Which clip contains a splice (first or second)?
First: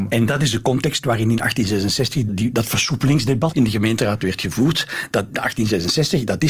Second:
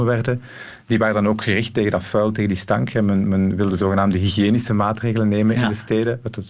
first